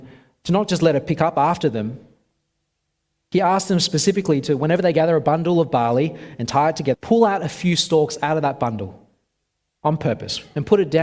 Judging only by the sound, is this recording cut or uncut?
cut